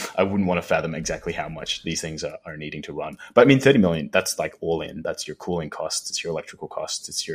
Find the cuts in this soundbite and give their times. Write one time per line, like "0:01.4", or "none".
none

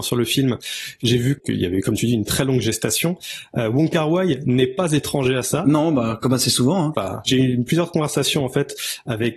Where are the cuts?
0:06.9

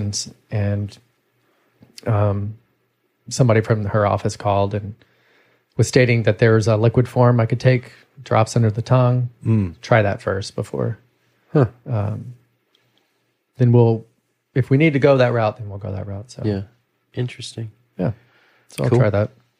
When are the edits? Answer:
none

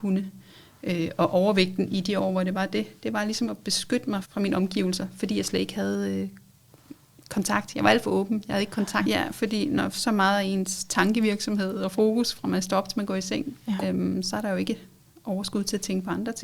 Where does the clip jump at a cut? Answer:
0:04.2
0:09.0
0:13.8

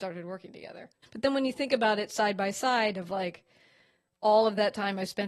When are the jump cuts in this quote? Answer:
0:01.0

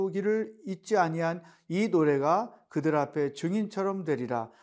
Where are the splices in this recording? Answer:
none

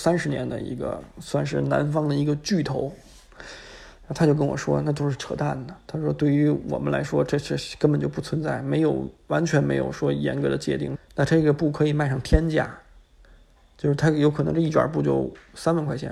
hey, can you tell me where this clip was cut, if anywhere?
0:11.0

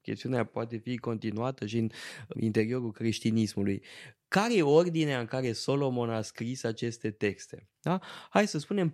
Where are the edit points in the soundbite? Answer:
0:02.3

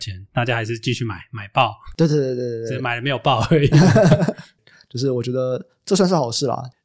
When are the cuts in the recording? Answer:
none

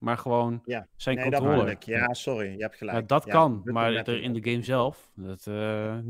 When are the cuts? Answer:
none

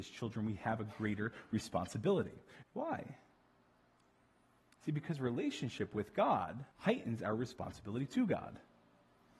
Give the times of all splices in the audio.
0:02.6
0:06.7

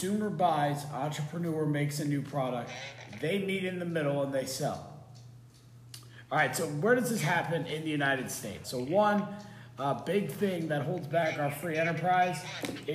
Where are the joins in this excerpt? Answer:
0:08.6

